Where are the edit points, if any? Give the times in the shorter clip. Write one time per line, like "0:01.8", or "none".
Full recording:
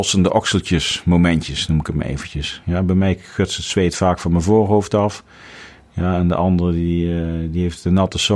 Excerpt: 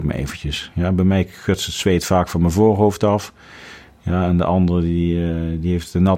none